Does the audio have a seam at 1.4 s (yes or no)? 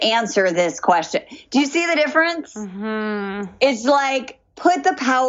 no